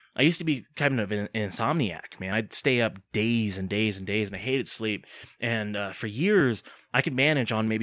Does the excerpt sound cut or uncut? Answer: uncut